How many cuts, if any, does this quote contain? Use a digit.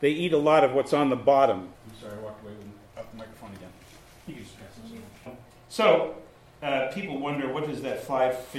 2